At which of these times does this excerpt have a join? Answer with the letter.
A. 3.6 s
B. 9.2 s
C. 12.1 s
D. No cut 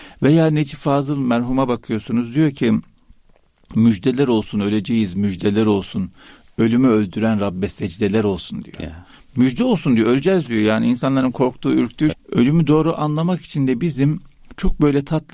C